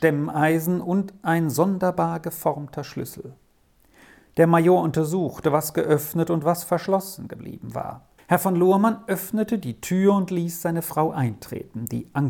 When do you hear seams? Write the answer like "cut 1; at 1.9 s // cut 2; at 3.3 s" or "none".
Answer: cut 1; at 8.2 s